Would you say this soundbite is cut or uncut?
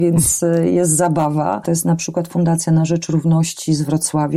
cut